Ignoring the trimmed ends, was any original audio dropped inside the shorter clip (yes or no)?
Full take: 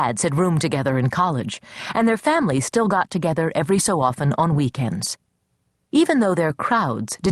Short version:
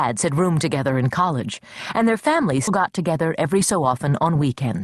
yes